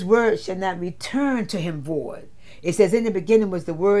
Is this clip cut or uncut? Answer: uncut